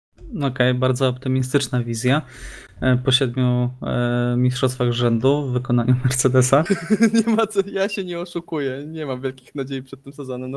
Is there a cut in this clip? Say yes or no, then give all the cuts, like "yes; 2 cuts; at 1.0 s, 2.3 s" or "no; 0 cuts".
yes; 1 cut; at 6.7 s